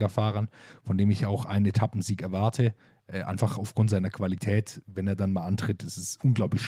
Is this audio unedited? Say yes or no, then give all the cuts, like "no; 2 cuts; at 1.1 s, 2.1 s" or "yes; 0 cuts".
yes; 0 cuts